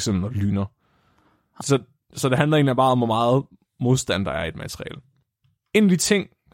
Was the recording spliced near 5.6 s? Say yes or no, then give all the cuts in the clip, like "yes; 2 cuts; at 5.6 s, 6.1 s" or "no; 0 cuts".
no; 1 cut; at 1.6 s